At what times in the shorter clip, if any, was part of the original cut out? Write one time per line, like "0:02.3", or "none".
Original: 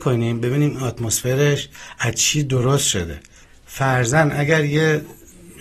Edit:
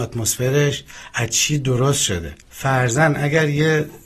0:02.4